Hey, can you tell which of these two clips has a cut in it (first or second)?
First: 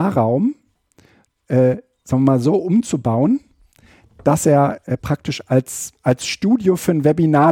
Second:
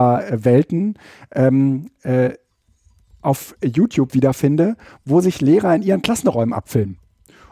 first